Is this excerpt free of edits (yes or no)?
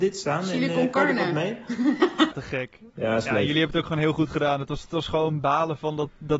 no